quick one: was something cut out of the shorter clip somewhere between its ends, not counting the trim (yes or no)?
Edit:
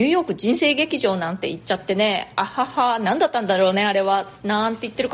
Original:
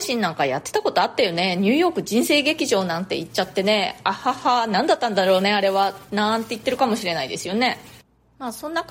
no